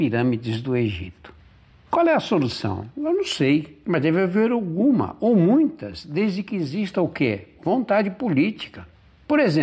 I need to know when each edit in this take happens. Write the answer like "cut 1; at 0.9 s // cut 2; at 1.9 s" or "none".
cut 1; at 1.7 s